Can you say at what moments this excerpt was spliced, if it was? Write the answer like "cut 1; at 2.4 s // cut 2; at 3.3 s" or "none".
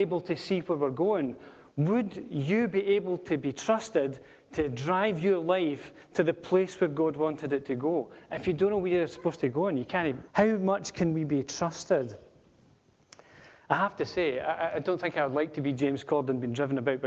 cut 1; at 10.3 s